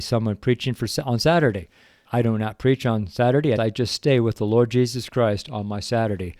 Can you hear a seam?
yes; 2 cuts; at 2.0 s, 3.6 s

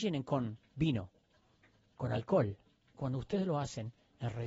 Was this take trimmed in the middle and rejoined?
yes; 1 cut; at 2.9 s

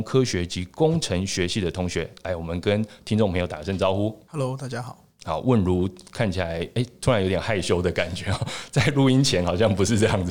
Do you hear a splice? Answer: no; 0 cuts

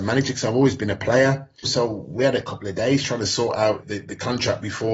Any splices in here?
yes; 2 cuts; at 1.6 s, 3.8 s

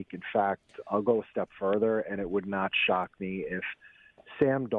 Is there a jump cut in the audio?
no; 0 cuts

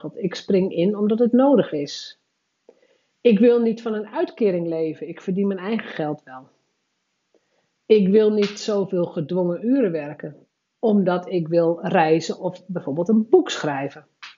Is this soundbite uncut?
yes; 0 cuts

